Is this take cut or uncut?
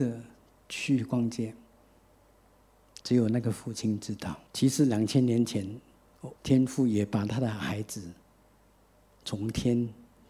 cut